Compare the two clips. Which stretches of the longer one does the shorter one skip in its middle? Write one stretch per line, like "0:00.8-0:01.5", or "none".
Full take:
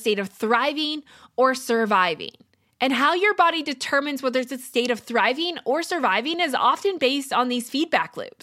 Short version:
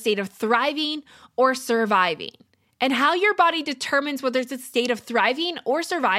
none